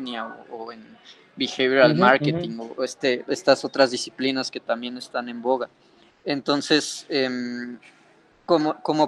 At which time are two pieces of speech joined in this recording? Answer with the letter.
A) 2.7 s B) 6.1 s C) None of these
B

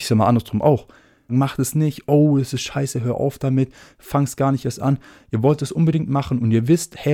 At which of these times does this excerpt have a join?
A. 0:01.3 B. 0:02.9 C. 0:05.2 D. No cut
A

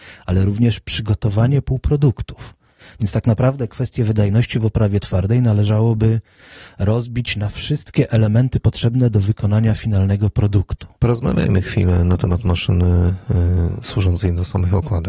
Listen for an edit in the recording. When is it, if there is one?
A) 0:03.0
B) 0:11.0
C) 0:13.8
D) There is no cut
B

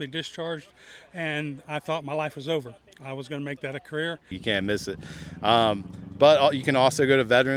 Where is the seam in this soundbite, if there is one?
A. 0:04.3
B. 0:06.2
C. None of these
A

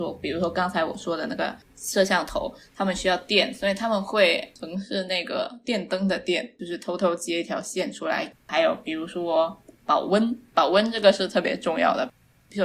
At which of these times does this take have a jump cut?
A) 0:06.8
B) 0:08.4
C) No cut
C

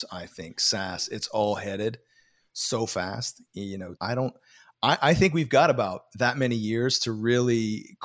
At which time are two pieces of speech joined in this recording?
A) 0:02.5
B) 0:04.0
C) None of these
B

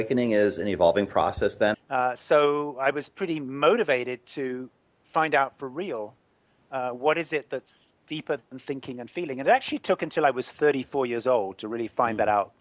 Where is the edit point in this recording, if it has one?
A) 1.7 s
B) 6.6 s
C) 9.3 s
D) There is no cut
A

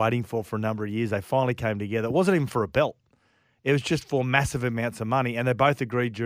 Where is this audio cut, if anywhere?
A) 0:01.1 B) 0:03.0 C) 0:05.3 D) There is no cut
D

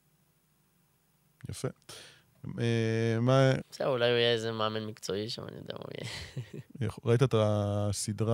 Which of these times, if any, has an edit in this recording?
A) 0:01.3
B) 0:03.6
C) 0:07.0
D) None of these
B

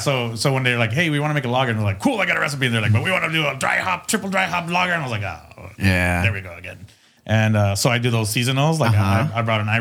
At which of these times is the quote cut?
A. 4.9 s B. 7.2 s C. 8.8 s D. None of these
B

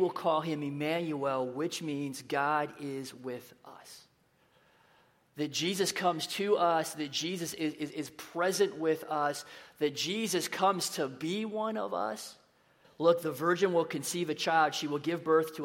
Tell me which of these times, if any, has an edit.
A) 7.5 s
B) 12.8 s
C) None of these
B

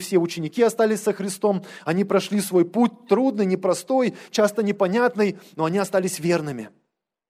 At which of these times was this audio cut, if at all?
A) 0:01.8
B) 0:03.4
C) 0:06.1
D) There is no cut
D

